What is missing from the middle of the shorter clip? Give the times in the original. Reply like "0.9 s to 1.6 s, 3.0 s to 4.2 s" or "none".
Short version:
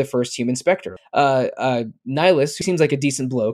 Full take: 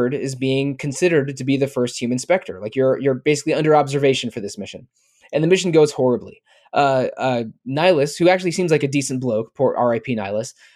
2.6 s to 6.6 s, 8.2 s to 8.5 s